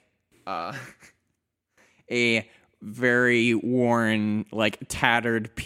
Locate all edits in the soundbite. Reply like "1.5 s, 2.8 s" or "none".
none